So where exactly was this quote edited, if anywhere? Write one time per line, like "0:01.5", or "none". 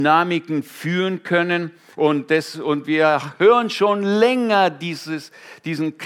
0:01.9